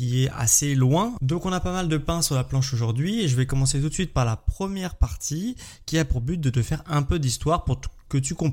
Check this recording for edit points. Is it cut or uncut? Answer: cut